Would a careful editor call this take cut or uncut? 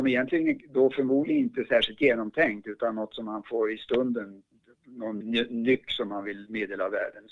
cut